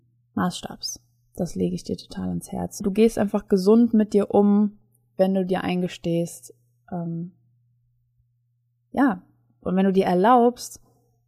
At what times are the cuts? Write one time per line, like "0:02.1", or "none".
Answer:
0:02.8